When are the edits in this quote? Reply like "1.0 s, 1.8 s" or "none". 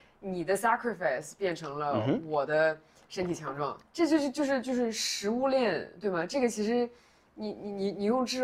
3.8 s